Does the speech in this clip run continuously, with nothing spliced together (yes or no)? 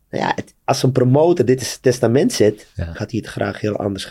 no